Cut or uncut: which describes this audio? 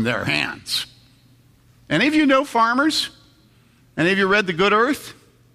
uncut